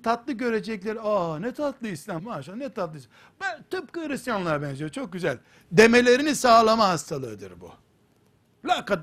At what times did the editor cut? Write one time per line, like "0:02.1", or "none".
0:02.2